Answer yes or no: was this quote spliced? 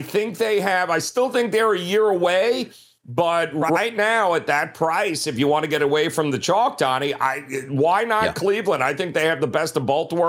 no